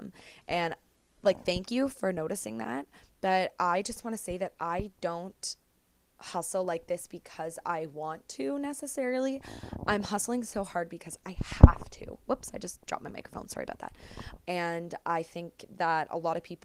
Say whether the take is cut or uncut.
cut